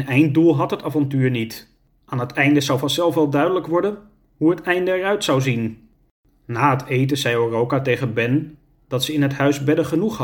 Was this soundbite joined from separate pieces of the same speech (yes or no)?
no